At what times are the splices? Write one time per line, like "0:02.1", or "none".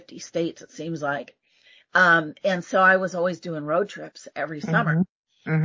none